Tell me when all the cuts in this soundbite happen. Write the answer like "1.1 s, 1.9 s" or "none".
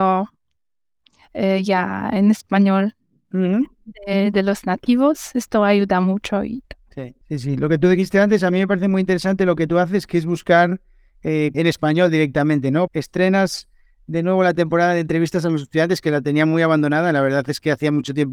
7.2 s, 11.5 s, 12.9 s